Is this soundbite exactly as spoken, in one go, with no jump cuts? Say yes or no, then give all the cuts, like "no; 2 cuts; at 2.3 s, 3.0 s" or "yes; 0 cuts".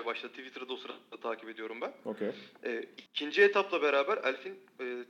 no; 1 cut; at 3.1 s